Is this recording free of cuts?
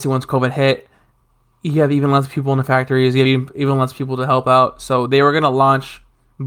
yes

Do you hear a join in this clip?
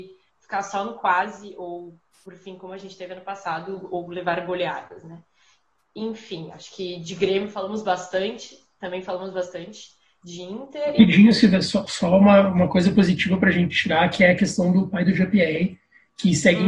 no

